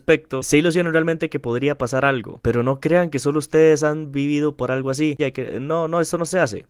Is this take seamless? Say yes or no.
no